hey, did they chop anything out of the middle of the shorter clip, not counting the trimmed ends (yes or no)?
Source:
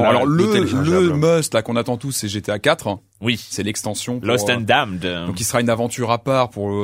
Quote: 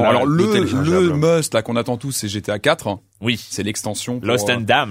no